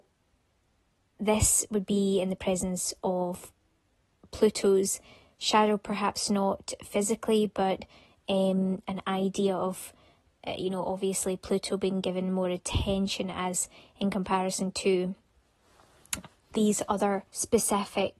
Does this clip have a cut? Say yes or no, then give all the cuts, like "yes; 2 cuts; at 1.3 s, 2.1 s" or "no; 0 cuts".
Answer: yes; 1 cut; at 17.3 s